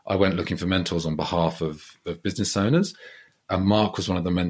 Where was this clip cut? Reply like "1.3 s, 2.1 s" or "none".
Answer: none